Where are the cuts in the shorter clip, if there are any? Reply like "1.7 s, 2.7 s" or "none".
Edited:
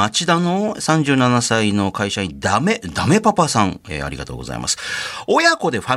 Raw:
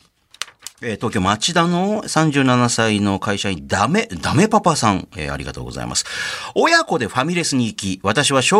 none